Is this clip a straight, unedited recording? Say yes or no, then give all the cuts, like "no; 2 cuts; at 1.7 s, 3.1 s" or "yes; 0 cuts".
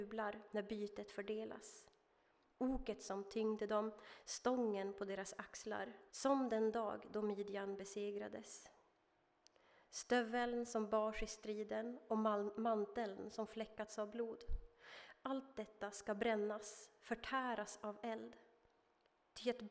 no; 1 cut; at 6.1 s